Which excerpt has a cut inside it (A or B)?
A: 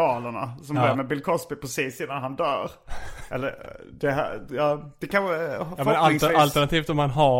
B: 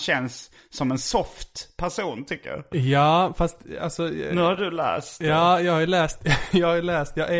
A